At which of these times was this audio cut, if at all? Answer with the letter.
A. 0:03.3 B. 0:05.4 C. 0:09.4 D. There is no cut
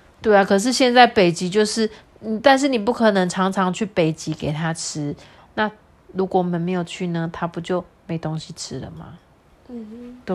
B